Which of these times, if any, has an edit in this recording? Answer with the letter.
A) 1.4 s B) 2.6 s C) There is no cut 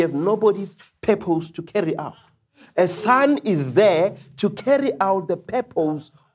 C